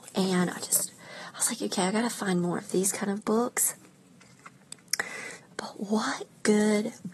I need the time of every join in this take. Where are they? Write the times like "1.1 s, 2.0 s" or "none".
5.4 s